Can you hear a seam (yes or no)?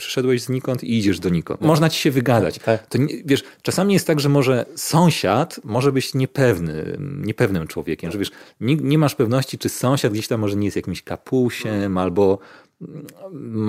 yes